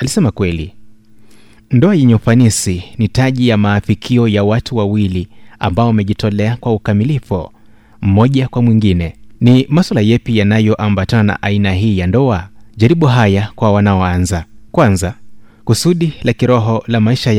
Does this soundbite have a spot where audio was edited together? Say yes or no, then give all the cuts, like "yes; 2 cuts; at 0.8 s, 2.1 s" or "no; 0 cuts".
yes; 3 cuts; at 9.3 s, 12.7 s, 14.7 s